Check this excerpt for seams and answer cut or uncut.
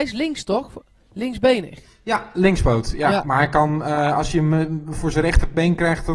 uncut